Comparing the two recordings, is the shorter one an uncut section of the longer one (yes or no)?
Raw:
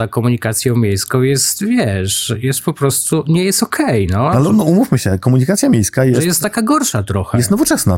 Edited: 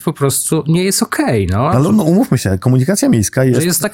yes